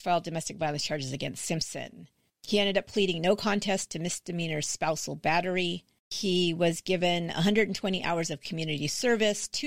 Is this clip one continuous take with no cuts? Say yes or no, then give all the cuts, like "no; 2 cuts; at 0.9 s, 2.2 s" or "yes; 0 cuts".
yes; 0 cuts